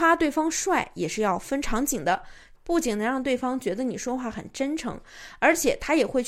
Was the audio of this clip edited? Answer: yes; 1 cut; at 2.6 s

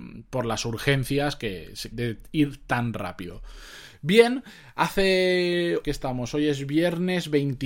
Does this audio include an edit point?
yes; 2 cuts; at 1.9 s, 5.8 s

